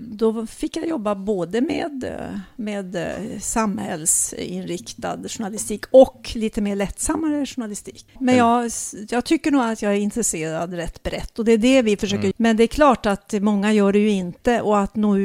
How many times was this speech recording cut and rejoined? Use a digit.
2